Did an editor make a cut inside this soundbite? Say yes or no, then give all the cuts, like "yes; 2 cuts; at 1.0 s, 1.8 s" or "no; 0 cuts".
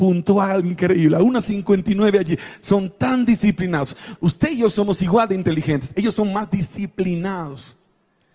yes; 1 cut; at 4.2 s